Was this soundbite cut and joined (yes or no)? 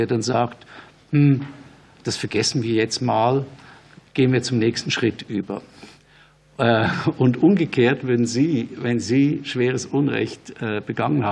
no